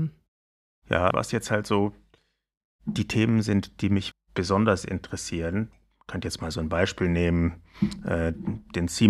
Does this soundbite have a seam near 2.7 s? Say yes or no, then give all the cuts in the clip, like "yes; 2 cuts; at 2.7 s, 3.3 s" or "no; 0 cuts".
no; 2 cuts; at 1.1 s, 4.1 s